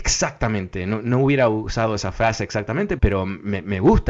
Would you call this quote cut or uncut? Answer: cut